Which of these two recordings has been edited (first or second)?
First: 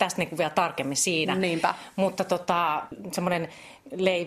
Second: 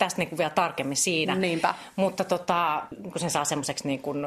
second